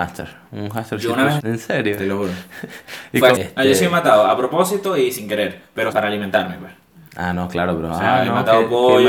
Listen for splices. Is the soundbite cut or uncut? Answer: cut